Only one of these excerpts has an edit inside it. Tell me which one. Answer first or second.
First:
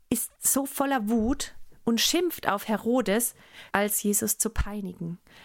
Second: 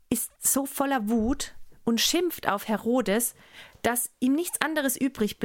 first